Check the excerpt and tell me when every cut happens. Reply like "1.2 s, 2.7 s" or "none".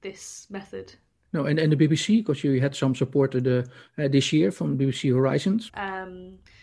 5.7 s